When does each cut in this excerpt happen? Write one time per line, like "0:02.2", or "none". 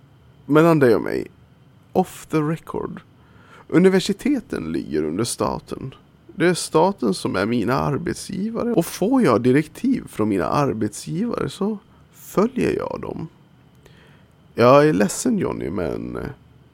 none